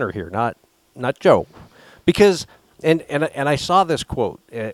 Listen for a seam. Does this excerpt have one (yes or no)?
no